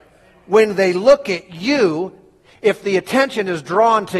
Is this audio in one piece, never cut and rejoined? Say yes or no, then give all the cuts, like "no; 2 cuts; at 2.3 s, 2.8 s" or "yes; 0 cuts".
yes; 0 cuts